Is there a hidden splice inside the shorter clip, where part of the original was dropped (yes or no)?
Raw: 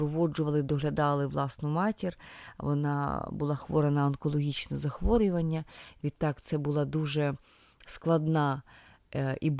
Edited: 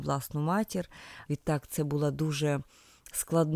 yes